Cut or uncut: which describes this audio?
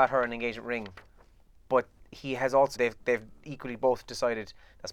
cut